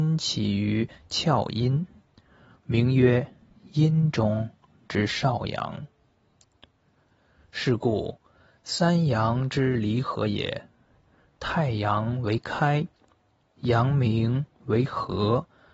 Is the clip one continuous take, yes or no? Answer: yes